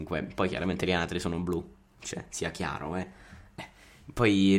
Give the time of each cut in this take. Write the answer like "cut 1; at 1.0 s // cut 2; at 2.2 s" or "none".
none